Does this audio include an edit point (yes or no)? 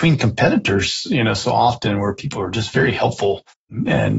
no